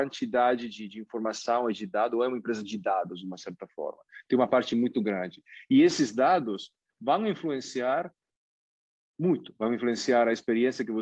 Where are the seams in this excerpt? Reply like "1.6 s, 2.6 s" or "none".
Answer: none